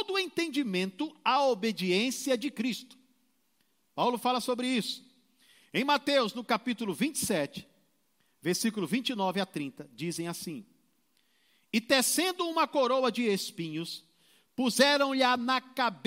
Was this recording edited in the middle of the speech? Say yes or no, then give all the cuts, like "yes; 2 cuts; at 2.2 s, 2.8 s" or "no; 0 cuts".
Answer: no; 0 cuts